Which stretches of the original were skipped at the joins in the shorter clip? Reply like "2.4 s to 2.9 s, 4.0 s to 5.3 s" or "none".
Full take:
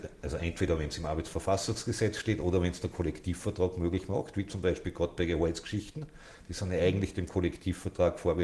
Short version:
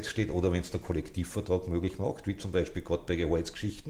none